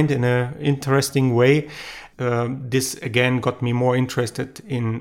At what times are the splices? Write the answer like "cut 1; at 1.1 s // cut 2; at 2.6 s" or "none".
cut 1; at 2.1 s

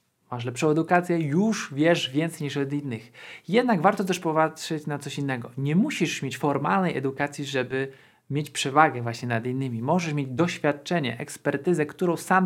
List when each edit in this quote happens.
none

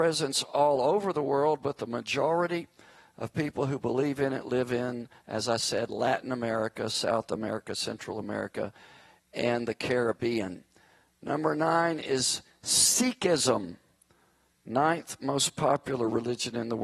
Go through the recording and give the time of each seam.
none

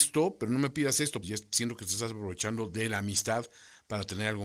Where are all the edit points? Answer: cut 1; at 1.2 s

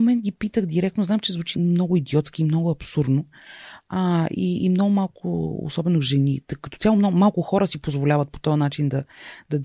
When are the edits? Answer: cut 1; at 1.5 s

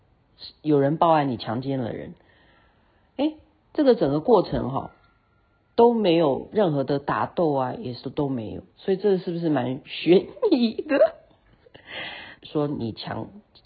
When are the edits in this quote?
cut 1; at 12.4 s

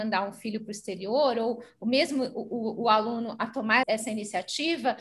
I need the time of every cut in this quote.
cut 1; at 3.8 s

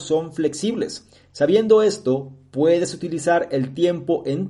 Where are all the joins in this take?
none

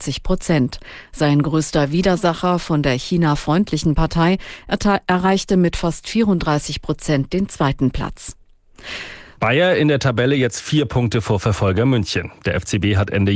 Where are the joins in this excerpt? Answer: cut 1; at 9.4 s

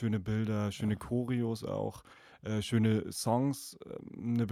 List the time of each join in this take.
none

